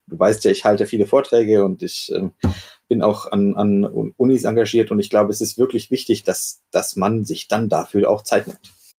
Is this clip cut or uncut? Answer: uncut